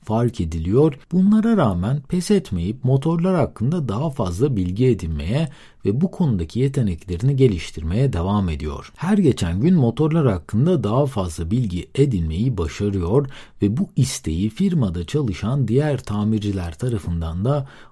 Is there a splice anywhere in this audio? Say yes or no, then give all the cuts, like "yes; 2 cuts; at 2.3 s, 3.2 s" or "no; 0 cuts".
yes; 1 cut; at 1.0 s